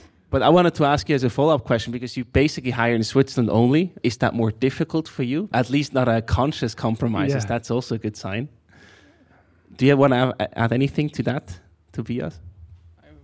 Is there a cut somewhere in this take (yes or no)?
yes